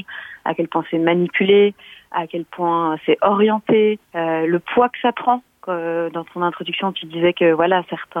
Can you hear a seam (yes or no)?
yes